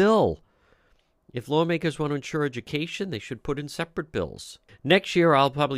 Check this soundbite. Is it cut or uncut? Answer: cut